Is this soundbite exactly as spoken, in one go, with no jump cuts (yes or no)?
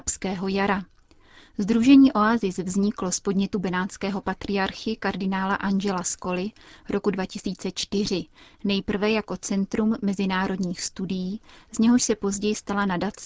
yes